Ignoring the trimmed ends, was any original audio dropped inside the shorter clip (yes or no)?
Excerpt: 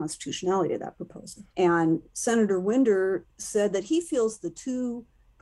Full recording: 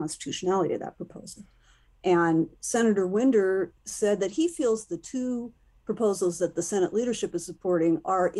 yes